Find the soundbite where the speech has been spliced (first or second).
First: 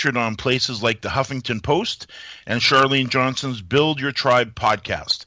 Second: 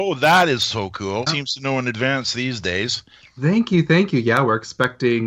second